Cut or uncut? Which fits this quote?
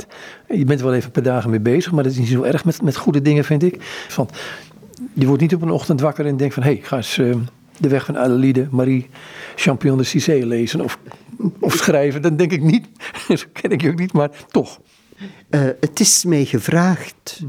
cut